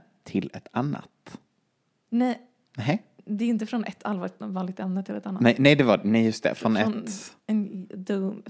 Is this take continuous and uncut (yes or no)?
yes